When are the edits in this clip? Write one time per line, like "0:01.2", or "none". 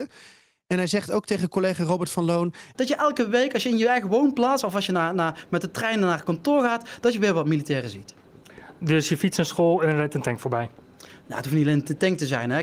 0:02.7